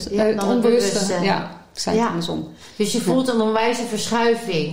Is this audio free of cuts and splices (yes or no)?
yes